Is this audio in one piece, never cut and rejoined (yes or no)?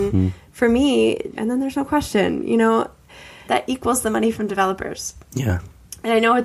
no